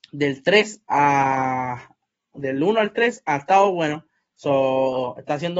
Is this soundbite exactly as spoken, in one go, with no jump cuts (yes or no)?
no